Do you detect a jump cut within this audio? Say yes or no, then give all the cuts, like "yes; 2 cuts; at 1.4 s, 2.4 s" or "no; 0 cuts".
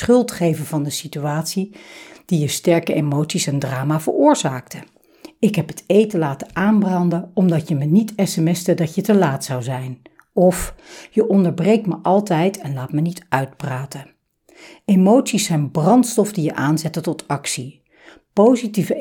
no; 0 cuts